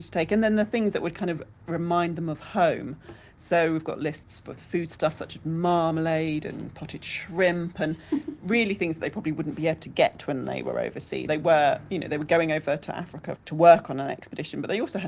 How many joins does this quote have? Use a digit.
2